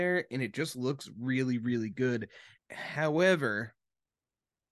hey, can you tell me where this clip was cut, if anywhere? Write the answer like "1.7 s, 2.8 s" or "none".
2.6 s